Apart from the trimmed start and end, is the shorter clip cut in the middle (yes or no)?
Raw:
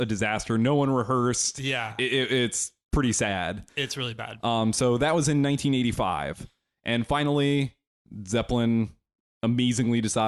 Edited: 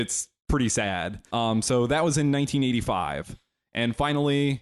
yes